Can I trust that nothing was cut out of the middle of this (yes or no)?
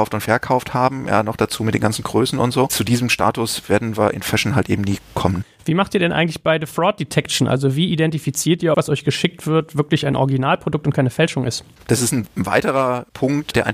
no